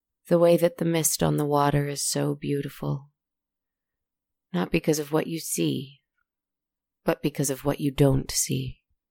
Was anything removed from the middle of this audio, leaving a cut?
no; 0 cuts

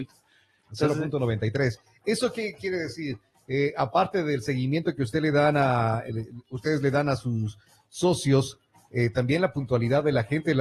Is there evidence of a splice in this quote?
no; 0 cuts

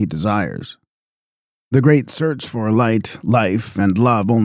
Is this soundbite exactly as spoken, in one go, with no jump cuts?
yes; 0 cuts

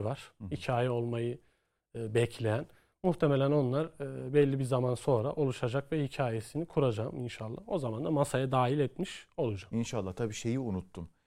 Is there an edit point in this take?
no; 0 cuts

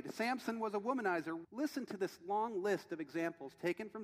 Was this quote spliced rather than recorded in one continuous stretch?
yes; 1 cut; at 1.4 s

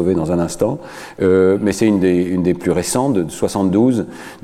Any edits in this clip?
no; 0 cuts

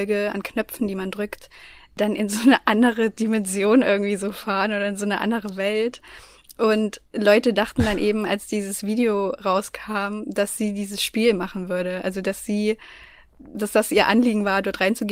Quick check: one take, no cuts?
no; 1 cut; at 13.5 s

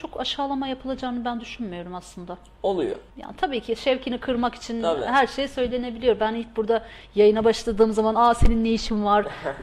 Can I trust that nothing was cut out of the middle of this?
no; 1 cut; at 3.1 s

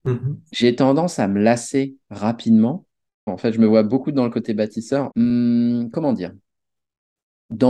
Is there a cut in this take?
yes; 2 cuts; at 3.3 s, 5.1 s

